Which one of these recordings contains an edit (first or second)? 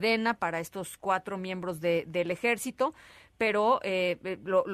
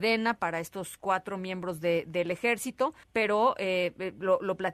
second